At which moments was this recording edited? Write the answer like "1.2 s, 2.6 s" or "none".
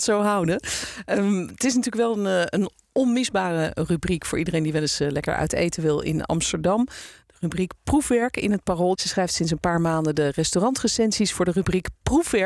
8.9 s